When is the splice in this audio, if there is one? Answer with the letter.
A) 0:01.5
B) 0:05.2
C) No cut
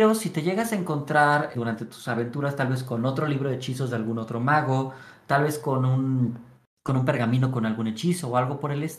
A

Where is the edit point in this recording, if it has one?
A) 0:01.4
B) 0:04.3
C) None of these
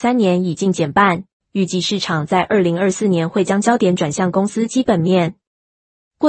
A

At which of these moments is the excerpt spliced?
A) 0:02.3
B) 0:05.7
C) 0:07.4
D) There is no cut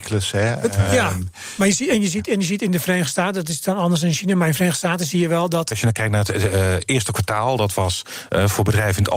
B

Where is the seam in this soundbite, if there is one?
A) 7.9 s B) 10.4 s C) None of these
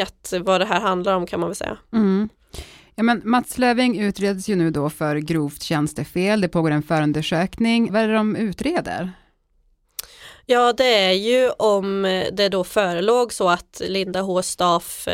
A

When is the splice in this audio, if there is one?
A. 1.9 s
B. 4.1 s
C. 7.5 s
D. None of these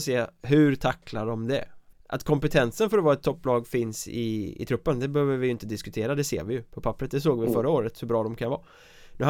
A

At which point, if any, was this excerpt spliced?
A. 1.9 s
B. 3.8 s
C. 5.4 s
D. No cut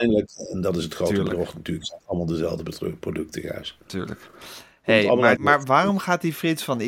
C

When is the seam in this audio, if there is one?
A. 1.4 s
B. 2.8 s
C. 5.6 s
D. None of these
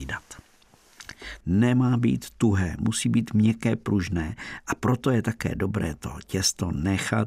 A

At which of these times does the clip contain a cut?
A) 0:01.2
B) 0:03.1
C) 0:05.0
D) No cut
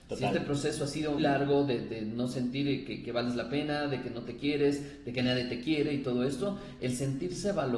A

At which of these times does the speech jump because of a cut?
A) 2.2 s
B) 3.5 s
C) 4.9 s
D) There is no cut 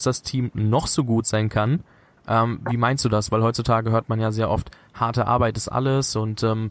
A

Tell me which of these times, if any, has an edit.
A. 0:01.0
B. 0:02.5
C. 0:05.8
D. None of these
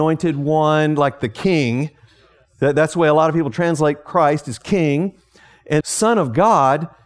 C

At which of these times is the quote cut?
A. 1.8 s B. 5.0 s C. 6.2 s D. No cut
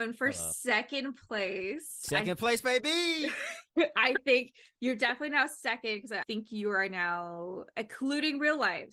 C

